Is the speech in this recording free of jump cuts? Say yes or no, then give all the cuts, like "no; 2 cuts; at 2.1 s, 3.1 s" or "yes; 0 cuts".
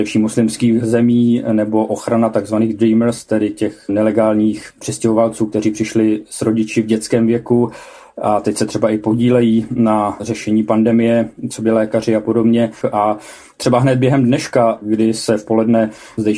no; 1 cut; at 12.8 s